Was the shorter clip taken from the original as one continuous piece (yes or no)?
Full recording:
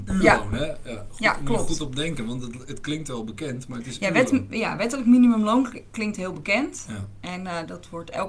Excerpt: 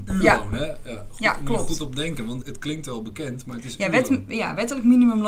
no